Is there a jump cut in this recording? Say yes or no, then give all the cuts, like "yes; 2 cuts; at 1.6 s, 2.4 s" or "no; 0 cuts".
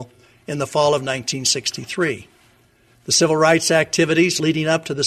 no; 0 cuts